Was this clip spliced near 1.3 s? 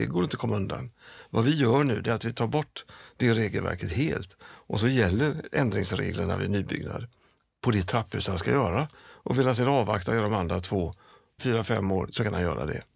no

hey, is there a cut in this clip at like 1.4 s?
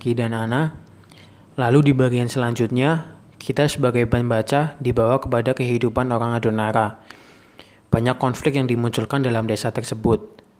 no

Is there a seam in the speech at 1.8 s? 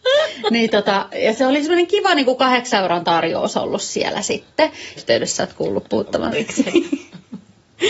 no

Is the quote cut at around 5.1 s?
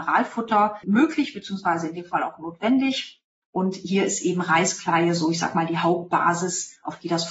no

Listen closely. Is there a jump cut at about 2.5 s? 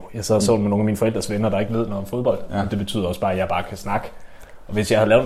no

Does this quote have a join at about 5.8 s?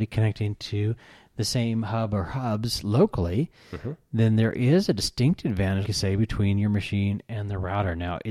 yes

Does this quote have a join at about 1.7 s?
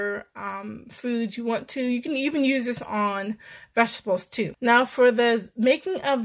no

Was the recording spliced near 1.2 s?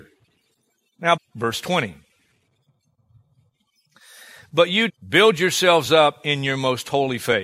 yes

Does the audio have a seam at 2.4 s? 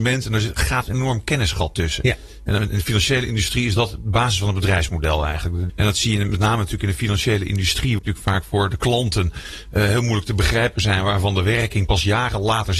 no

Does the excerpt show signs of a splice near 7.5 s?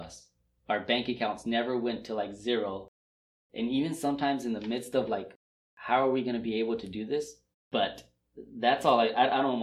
yes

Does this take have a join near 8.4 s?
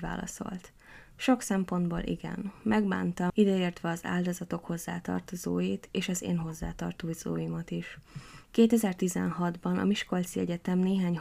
yes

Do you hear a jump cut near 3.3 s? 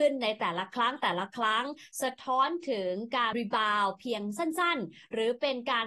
yes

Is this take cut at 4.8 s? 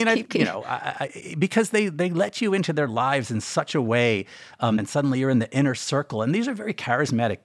yes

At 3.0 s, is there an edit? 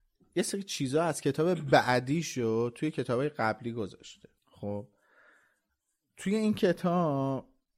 no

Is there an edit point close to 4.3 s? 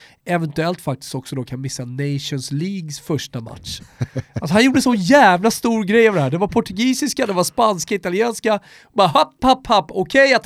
no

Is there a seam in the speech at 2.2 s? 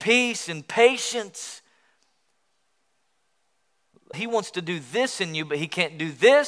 no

